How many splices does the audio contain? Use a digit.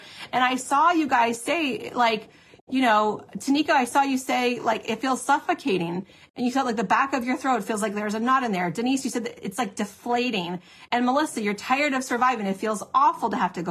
0